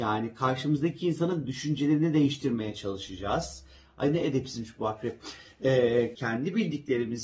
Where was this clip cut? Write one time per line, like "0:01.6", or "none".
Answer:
0:06.1